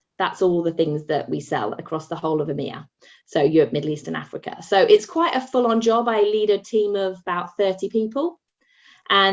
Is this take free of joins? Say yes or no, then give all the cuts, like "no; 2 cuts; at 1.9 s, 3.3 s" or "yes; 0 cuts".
yes; 0 cuts